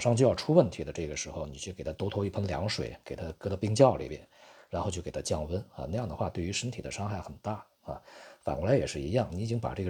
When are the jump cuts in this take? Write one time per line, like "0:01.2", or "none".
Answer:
none